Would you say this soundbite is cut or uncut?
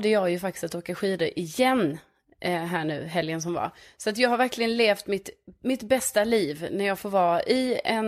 uncut